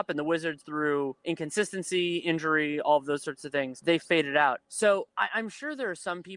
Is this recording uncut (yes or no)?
yes